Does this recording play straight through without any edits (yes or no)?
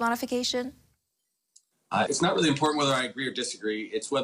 no